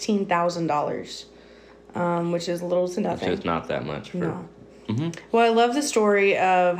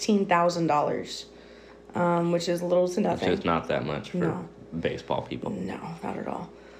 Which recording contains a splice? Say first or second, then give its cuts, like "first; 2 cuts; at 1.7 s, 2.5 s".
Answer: first; 1 cut; at 4.7 s